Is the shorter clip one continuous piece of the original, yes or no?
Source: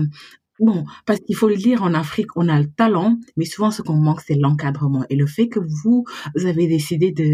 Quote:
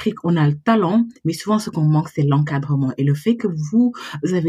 yes